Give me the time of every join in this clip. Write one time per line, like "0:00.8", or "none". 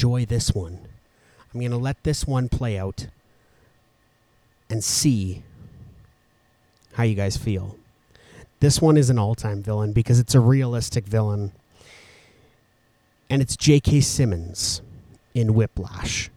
0:08.5